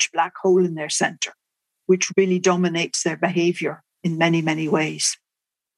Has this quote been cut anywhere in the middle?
no; 0 cuts

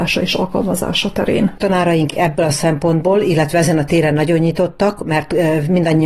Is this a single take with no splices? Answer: yes; 0 cuts

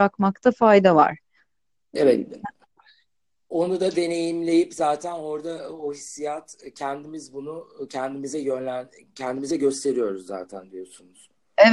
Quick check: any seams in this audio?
no; 0 cuts

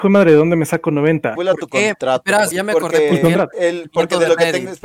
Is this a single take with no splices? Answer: no; 2 cuts; at 1.4 s, 2.5 s

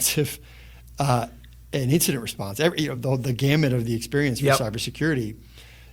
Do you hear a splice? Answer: no; 0 cuts

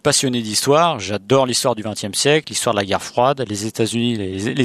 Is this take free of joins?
yes; 0 cuts

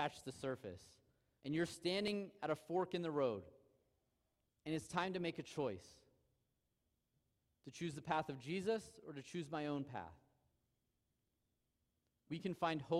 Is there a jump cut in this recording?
yes; 1 cut; at 1.4 s

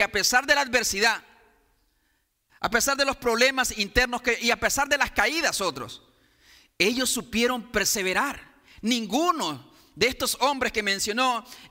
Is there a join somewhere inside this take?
yes; 1 cut; at 2.5 s

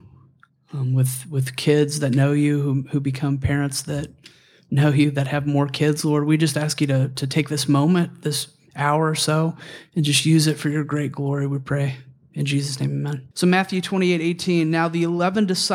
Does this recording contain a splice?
yes; 1 cut; at 13.3 s

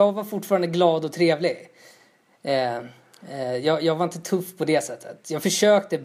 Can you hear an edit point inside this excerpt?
no; 0 cuts

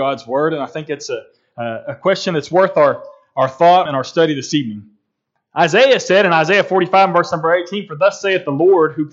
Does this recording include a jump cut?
yes; 1 cut; at 3.9 s

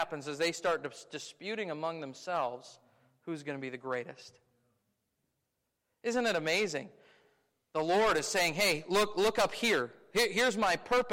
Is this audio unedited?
yes; 0 cuts

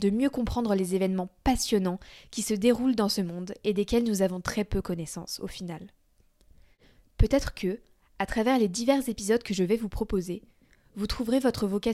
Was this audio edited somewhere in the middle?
no; 0 cuts

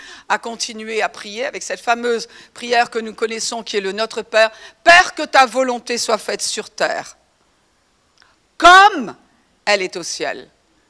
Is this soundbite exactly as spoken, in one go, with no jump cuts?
yes; 0 cuts

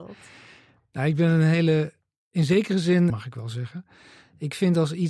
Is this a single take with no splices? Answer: no; 1 cut; at 3.1 s

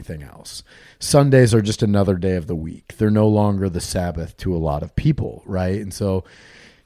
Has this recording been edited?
yes; 1 cut; at 0.9 s

